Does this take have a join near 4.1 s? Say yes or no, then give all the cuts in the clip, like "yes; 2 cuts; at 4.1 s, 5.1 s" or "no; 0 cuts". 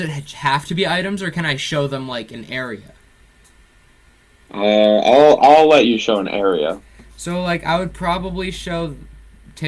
no; 0 cuts